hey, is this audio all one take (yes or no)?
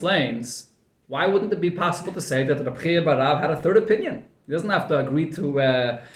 yes